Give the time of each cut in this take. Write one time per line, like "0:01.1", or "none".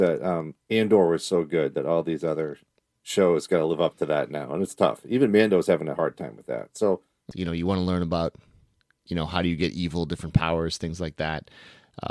0:07.3